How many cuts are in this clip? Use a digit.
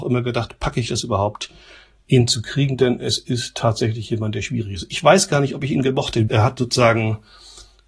1